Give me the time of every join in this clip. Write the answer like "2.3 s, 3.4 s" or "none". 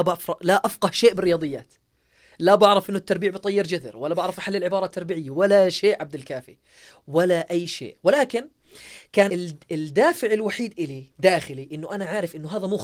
9.3 s, 11.1 s